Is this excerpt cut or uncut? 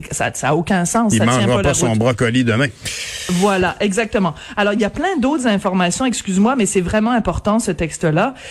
uncut